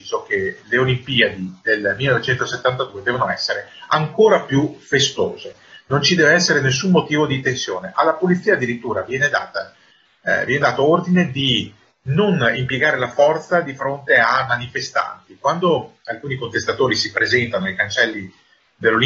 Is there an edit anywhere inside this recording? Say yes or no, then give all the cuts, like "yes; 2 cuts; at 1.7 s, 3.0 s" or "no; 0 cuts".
no; 0 cuts